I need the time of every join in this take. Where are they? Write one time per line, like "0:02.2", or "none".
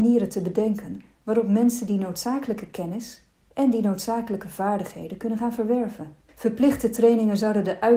0:06.3